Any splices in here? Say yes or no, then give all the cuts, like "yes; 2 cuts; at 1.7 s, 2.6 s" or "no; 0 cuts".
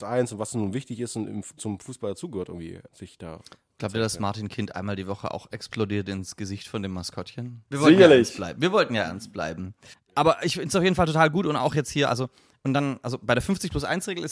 yes; 3 cuts; at 1.6 s, 2.9 s, 7.7 s